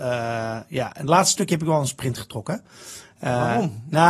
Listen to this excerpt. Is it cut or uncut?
uncut